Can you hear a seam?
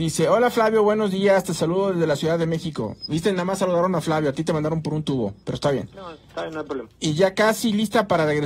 no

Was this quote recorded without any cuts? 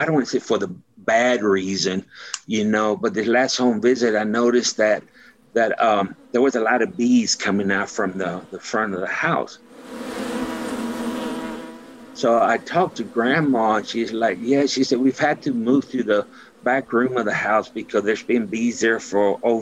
yes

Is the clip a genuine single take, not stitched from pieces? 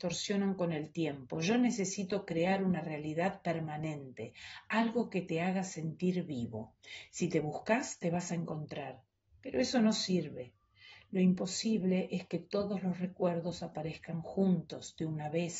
yes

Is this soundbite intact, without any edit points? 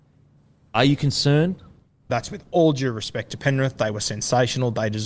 no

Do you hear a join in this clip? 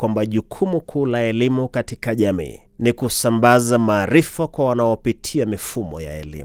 yes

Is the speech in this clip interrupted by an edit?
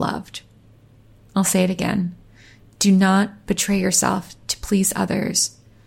no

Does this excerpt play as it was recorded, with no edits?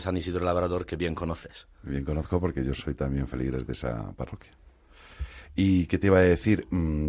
yes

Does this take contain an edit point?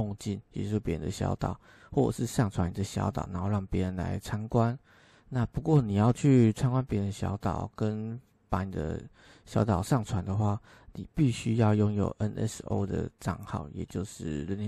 no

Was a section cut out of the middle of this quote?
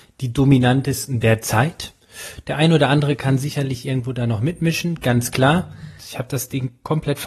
yes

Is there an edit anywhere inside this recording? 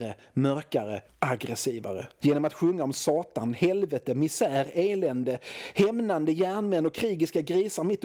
yes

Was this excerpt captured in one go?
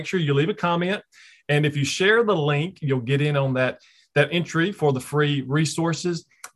yes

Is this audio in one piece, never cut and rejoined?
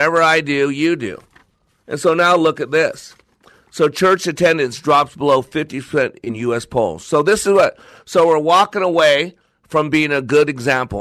yes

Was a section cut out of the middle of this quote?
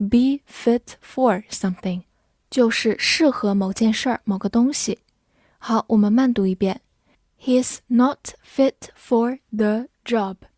no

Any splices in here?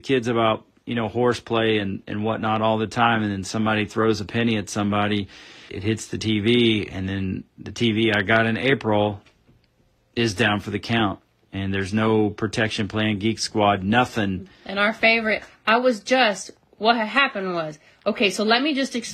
yes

